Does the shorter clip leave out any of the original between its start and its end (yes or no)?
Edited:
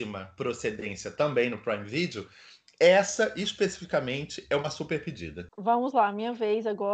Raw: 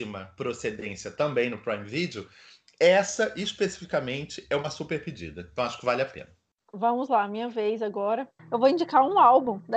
yes